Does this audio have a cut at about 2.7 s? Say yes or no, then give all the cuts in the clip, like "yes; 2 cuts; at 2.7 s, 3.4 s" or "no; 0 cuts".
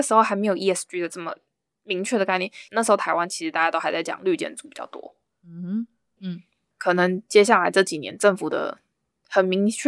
yes; 2 cuts; at 2.7 s, 6.2 s